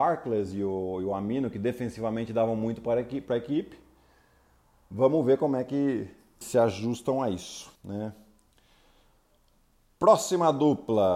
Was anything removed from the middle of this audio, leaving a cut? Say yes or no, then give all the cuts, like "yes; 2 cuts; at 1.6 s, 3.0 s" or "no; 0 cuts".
yes; 2 cuts; at 6.4 s, 7.8 s